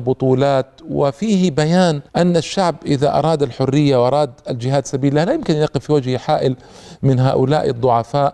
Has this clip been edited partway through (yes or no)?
yes